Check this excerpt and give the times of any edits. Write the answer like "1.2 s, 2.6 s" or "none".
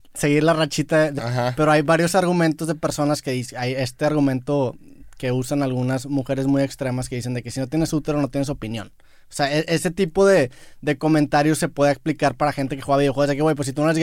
1.2 s